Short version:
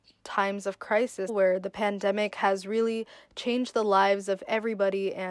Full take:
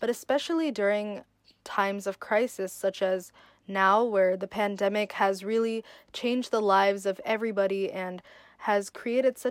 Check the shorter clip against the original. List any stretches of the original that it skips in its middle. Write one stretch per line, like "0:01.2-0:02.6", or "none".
0:02.7-0:04.1